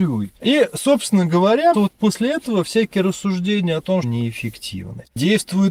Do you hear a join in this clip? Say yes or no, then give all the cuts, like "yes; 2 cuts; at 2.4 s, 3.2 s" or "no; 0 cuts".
yes; 2 cuts; at 1.7 s, 4.0 s